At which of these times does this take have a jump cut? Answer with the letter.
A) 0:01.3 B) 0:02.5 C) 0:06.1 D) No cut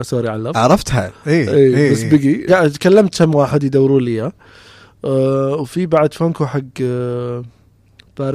B